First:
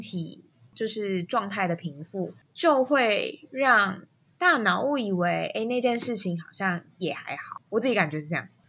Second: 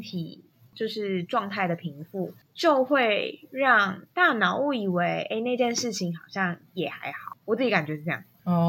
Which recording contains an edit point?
second; 1 cut; at 4.1 s

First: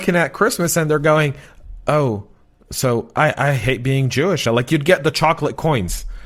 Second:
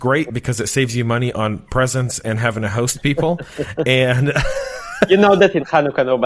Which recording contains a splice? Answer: first; 1 cut; at 4.5 s

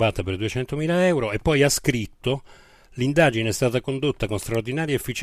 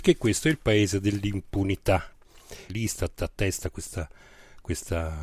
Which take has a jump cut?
second; 1 cut; at 2.7 s

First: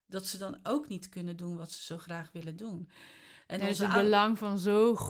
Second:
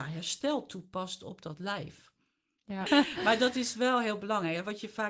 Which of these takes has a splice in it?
second; 1 cut; at 2.9 s

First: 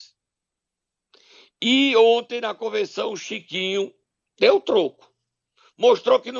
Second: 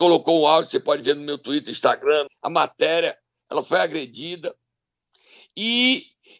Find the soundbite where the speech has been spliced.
second; 1 cut; at 2.3 s

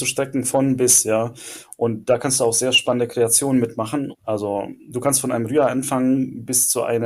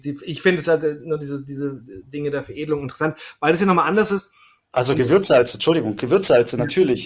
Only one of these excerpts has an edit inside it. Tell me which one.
first; 1 cut; at 4.1 s

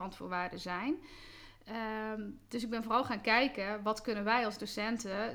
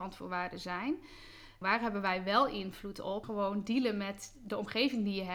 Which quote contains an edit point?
second; 2 cuts; at 1.6 s, 3.2 s

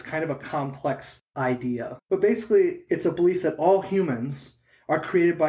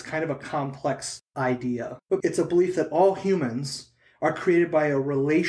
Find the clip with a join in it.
second; 1 cut; at 2.2 s

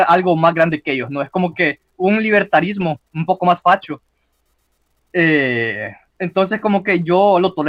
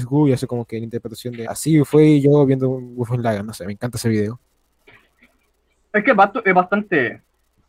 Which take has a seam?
second; 1 cut; at 1.5 s

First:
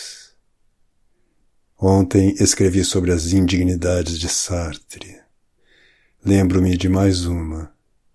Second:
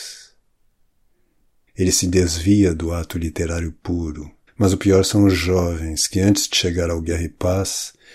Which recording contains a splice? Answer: second; 2 cuts; at 1.7 s, 4.5 s

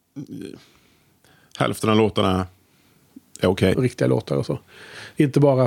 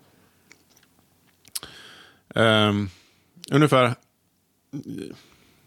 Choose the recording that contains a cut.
first; 1 cut; at 3.7 s

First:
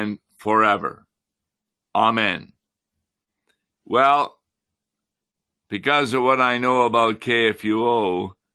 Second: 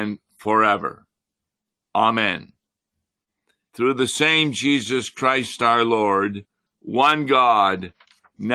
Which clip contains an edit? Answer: second; 2 cuts; at 3.7 s, 6.7 s

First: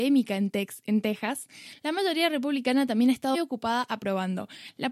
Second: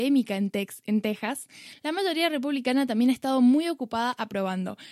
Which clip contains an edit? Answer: first; 1 cut; at 3.3 s

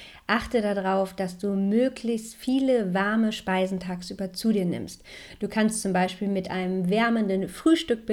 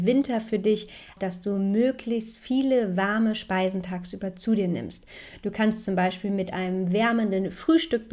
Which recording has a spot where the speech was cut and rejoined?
second; 1 cut; at 1.2 s

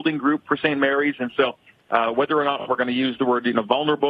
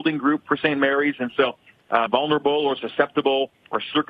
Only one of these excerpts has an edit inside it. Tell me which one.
second; 1 cut; at 2.1 s

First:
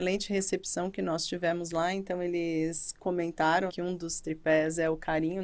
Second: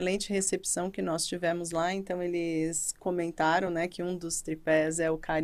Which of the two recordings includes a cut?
first; 1 cut; at 3.7 s

